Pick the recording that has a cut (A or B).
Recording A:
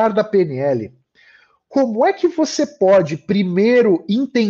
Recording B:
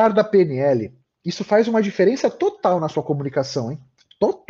B